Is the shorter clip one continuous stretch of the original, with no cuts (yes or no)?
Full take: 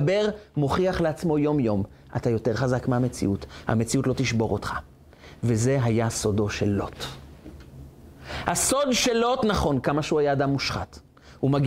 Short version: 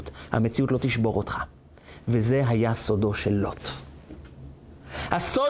yes